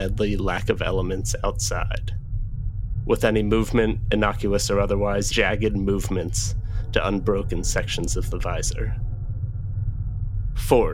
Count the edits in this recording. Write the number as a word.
one